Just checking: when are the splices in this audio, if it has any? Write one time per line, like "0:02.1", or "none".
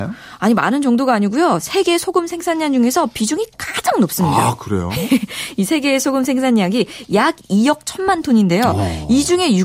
none